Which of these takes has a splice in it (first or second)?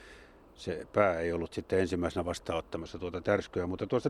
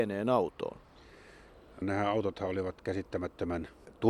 second